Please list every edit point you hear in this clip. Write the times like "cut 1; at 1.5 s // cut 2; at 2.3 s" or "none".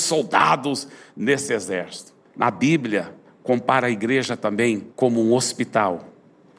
cut 1; at 2.3 s // cut 2; at 4.9 s